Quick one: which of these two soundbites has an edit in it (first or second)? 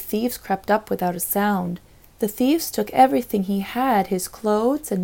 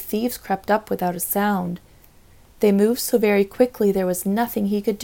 first